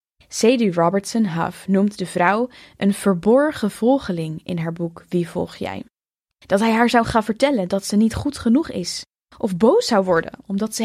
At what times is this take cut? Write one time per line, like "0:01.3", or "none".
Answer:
0:06.3